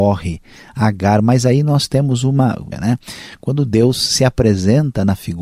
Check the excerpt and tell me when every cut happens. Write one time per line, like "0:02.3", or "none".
0:02.7